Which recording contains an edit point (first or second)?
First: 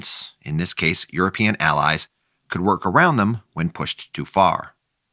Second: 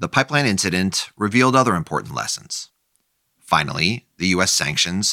second